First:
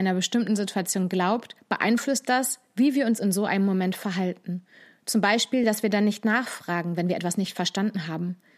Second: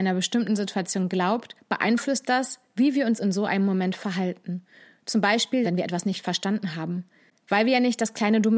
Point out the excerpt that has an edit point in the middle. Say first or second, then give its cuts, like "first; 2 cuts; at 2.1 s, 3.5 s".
second; 1 cut; at 5.6 s